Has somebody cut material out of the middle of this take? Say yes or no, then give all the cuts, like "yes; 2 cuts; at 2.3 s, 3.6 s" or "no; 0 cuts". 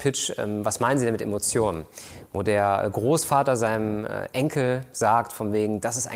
no; 0 cuts